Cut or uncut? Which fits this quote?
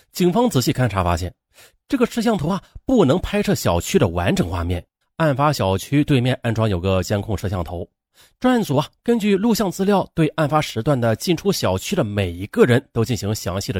cut